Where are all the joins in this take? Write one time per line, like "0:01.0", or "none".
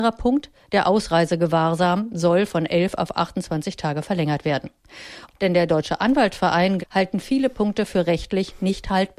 0:05.3
0:06.8